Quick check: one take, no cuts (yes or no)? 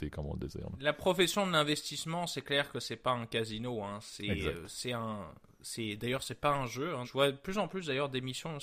no